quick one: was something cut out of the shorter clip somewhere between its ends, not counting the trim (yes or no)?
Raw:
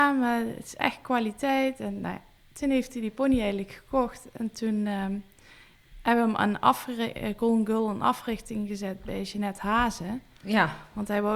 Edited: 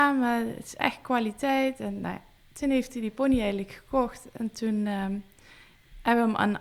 no